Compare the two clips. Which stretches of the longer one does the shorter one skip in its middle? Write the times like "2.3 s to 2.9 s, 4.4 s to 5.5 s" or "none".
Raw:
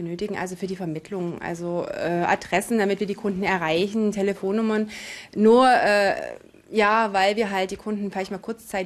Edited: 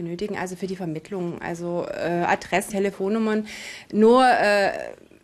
2.7 s to 4.1 s